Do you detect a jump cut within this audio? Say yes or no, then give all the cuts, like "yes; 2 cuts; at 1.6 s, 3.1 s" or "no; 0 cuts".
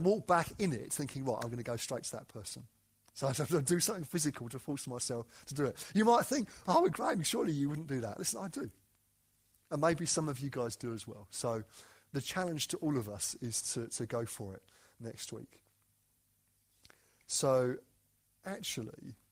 no; 0 cuts